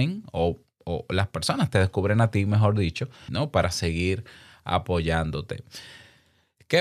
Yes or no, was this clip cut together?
yes